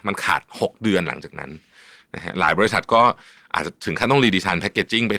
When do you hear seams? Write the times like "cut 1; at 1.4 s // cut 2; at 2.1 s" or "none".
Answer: none